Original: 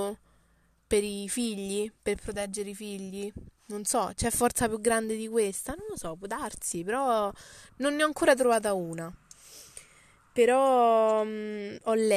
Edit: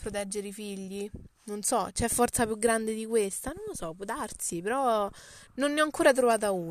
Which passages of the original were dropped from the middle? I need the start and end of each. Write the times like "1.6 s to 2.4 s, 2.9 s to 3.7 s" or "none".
none